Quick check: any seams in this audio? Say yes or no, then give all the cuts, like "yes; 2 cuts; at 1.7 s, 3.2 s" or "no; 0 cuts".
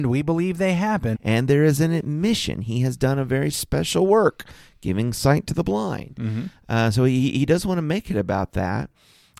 yes; 1 cut; at 1.1 s